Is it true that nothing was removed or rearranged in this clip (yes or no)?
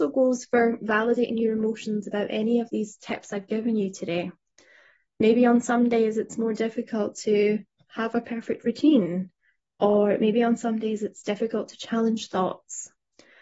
yes